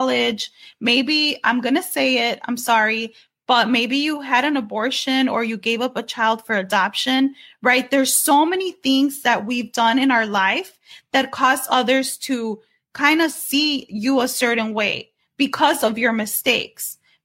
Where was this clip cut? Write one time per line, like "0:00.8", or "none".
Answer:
none